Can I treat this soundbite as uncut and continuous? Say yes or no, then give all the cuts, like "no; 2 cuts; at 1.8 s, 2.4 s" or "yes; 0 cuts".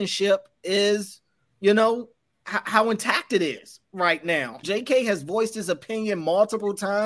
no; 1 cut; at 4.6 s